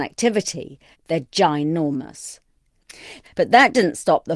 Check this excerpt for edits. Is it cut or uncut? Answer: cut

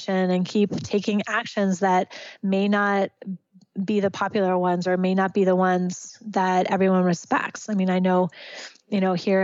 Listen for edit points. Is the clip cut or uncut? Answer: uncut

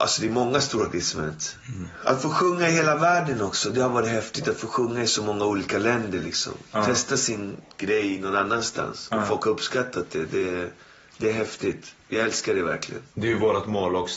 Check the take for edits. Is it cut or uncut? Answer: uncut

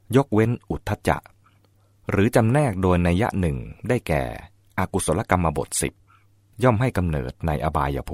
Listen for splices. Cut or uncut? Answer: uncut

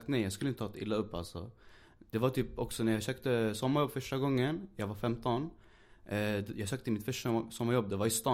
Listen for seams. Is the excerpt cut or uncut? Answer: uncut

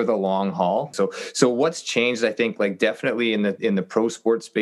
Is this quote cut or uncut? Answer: cut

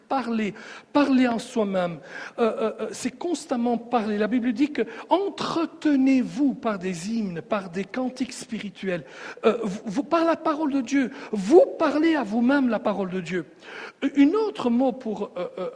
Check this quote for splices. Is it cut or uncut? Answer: uncut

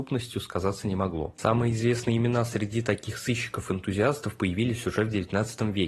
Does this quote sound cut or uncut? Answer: uncut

